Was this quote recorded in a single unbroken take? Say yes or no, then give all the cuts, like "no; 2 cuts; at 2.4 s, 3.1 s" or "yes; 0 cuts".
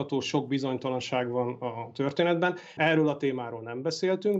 no; 1 cut; at 2.8 s